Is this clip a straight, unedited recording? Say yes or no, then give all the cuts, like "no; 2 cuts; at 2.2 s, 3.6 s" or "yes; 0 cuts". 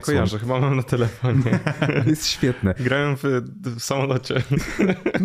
yes; 0 cuts